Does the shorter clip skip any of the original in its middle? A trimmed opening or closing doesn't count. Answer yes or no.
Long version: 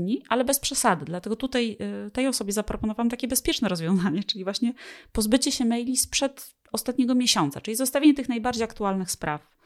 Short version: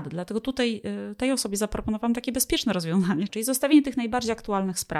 yes